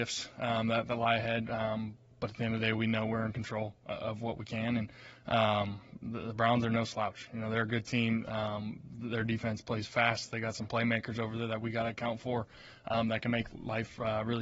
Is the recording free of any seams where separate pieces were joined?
yes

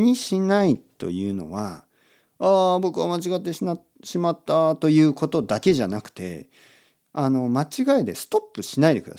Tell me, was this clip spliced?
no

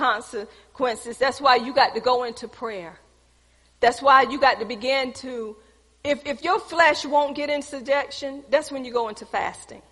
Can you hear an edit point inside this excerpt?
no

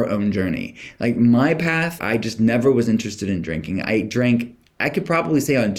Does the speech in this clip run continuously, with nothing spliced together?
no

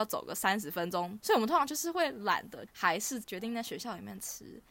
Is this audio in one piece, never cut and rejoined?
no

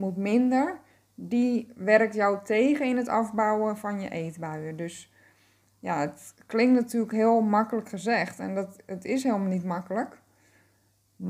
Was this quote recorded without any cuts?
yes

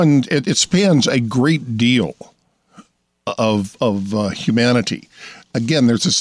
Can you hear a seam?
no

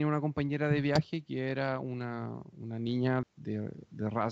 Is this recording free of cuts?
no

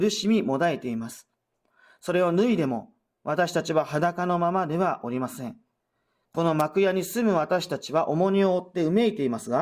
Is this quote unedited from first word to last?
yes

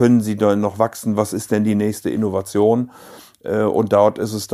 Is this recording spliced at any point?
no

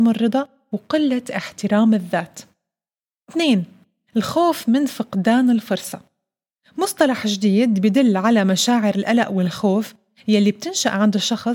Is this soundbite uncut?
yes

